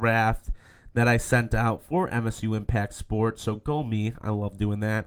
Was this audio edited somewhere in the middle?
no; 0 cuts

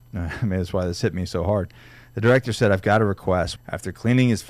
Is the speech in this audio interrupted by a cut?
yes; 1 cut; at 3.6 s

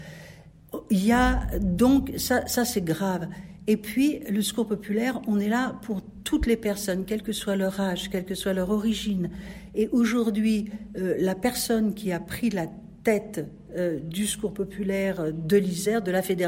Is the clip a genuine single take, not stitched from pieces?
yes; 0 cuts

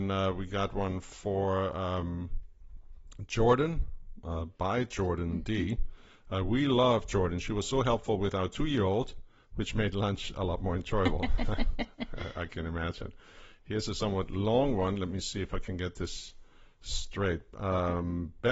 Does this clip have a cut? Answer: no; 0 cuts

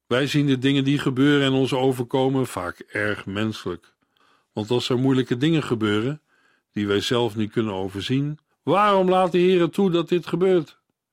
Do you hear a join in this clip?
yes; 1 cut; at 8.5 s

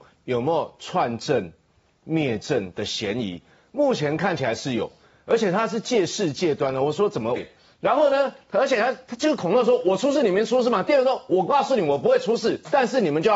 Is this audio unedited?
no; 1 cut; at 7.4 s

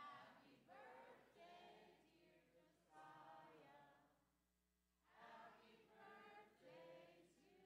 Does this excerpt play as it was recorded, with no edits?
yes; 0 cuts

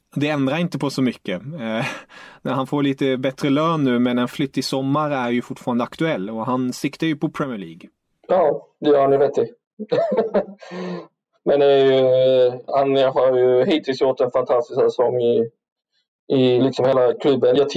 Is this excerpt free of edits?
no; 2 cuts; at 12.7 s, 16.6 s

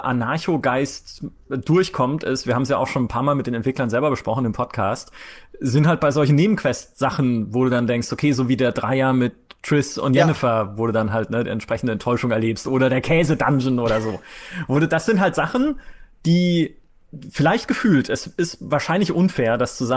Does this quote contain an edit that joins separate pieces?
no; 0 cuts

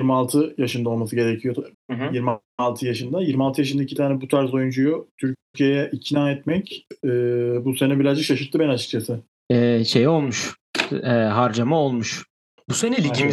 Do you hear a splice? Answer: yes; 2 cuts; at 1.7 s, 9.5 s

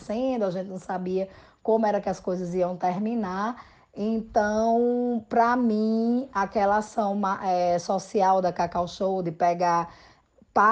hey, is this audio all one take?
yes; 0 cuts

